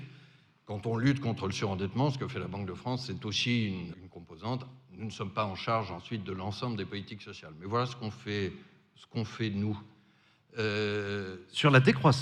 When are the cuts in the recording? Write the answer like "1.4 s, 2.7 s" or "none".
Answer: 3.9 s